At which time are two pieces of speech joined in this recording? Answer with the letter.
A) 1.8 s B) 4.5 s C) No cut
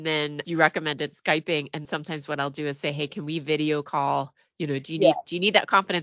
A